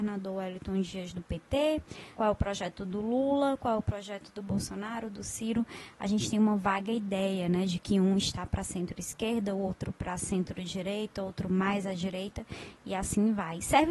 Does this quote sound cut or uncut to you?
cut